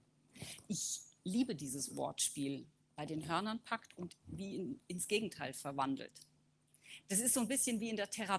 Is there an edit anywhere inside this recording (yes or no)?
yes